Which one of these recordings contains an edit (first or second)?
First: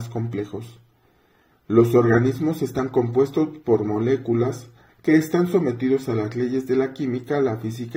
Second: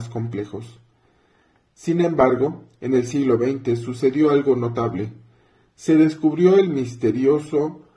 first